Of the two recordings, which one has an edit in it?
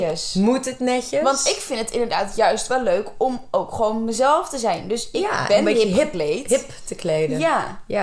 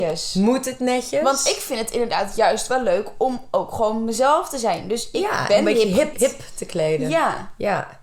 second; 1 cut; at 6.1 s

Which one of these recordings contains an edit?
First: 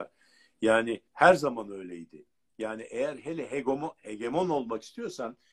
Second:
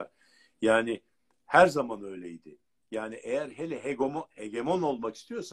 first; 1 cut; at 1.1 s

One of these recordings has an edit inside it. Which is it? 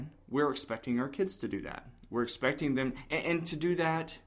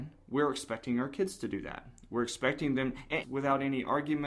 second; 1 cut; at 3.2 s

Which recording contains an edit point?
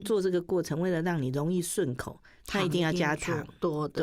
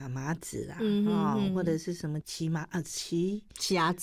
second; 1 cut; at 2.2 s

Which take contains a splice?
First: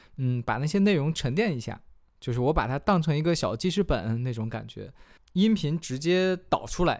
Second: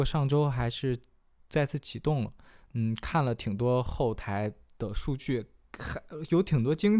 first; 1 cut; at 5.2 s

